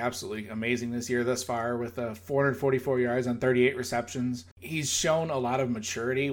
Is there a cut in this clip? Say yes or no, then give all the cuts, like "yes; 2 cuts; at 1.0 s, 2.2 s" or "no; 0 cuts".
yes; 1 cut; at 4.5 s